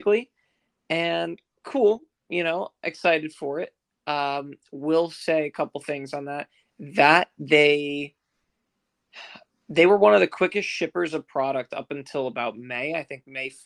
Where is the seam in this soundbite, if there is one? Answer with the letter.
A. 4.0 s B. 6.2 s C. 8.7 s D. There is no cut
D